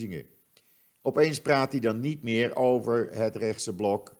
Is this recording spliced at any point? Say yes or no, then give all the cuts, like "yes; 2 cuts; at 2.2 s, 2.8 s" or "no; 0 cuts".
no; 0 cuts